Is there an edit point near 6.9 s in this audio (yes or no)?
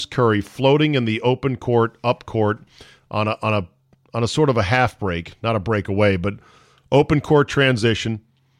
no